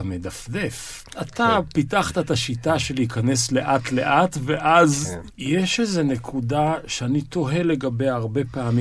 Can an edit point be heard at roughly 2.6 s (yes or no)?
no